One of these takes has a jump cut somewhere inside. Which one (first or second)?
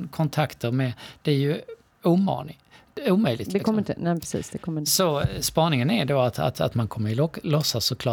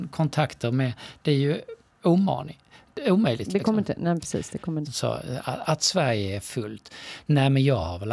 second